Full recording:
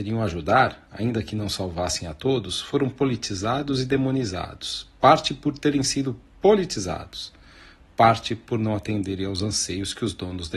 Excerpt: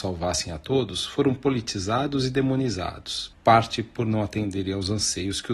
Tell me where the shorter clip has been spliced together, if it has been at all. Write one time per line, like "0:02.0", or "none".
0:03.3